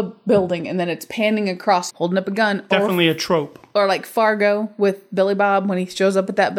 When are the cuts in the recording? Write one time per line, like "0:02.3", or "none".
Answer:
0:01.9